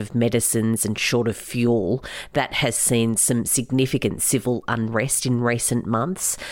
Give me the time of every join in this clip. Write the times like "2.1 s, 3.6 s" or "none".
none